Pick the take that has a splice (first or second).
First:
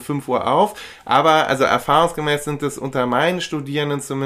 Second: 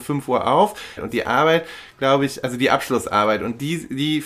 second